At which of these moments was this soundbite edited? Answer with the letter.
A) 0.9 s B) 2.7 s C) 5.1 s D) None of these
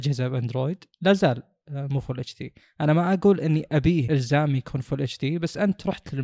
A